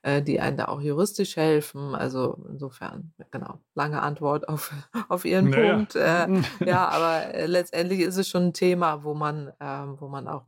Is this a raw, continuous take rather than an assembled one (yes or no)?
yes